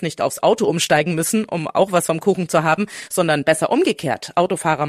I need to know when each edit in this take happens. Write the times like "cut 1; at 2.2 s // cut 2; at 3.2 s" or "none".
none